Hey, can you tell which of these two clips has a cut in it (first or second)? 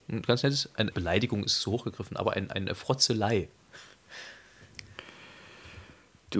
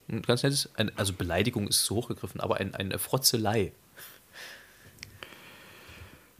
first